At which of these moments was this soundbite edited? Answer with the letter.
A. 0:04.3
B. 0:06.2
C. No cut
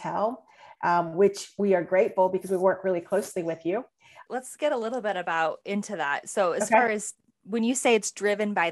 A